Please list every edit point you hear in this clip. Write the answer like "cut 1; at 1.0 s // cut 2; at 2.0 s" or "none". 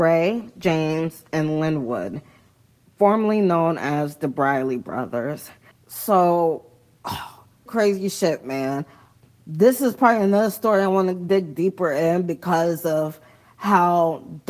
cut 1; at 5.7 s // cut 2; at 7.7 s